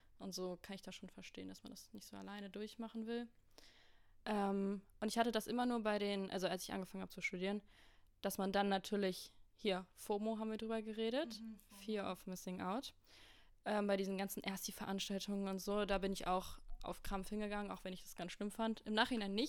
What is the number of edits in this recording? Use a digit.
1